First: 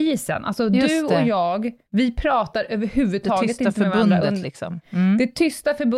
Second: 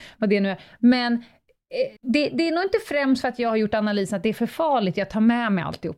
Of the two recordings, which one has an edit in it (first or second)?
second